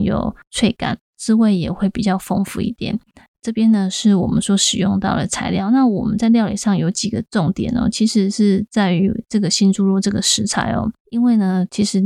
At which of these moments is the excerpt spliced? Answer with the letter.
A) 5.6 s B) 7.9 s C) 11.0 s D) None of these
C